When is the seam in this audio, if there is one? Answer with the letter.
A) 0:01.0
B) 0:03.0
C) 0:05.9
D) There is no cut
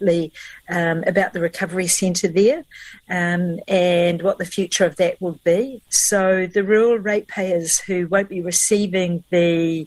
C